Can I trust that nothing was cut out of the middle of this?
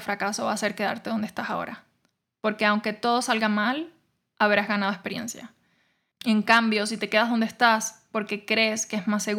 no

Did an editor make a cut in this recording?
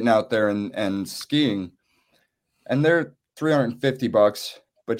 no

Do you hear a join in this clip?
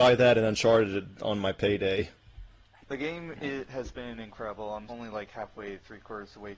yes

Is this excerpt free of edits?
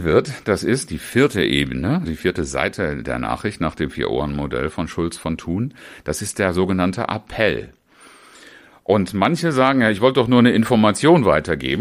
no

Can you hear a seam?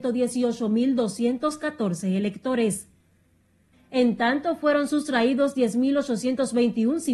yes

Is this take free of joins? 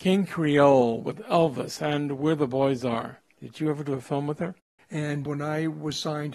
no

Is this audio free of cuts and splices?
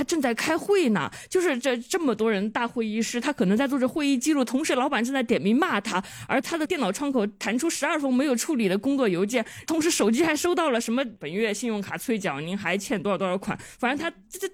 yes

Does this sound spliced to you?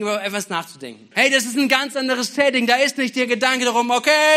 yes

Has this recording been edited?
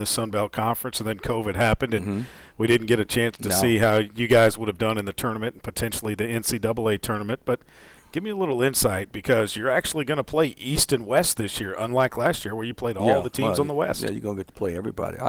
no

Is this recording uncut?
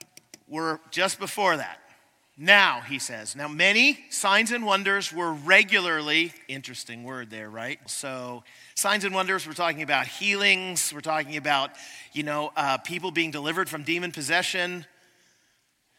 no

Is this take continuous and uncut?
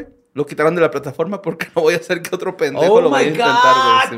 yes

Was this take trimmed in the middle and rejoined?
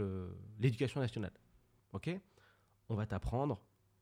yes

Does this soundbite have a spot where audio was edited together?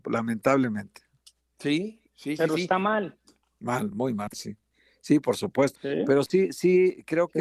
yes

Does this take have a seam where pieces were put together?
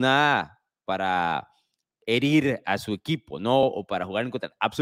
no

